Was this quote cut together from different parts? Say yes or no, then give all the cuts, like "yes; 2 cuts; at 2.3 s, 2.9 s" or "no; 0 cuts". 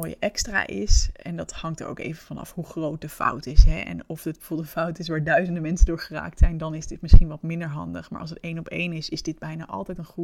no; 0 cuts